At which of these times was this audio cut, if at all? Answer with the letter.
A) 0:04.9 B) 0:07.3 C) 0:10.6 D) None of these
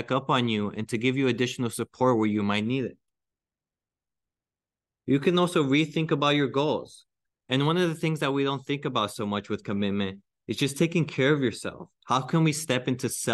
B